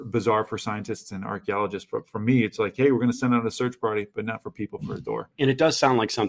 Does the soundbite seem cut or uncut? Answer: uncut